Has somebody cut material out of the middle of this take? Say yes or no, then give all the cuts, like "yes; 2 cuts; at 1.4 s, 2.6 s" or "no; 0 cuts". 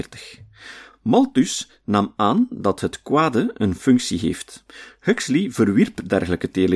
no; 0 cuts